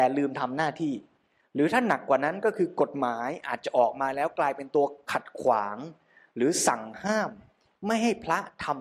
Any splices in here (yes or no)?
no